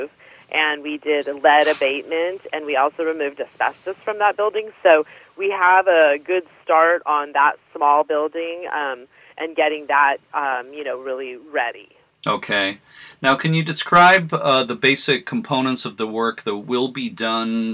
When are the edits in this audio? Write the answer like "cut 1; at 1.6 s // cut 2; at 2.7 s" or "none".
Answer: cut 1; at 12.1 s